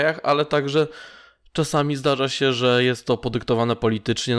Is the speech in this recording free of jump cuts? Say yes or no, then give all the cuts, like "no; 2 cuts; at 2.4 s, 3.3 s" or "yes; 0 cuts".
yes; 0 cuts